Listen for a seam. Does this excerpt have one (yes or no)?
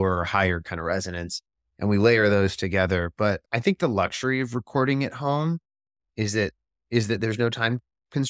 no